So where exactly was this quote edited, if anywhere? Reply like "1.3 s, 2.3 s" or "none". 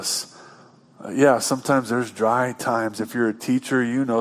none